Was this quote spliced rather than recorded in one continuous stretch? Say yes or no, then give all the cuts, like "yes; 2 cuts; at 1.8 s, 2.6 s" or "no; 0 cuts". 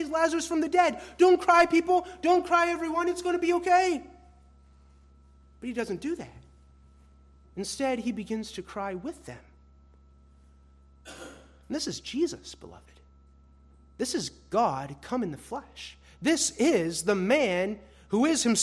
no; 0 cuts